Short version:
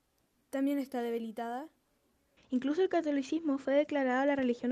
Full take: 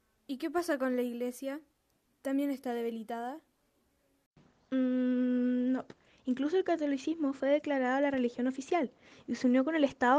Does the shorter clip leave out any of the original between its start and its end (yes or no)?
yes